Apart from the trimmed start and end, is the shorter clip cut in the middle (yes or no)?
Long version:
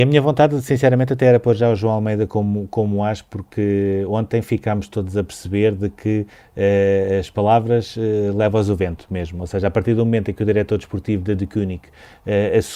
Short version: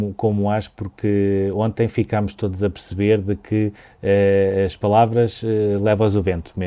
no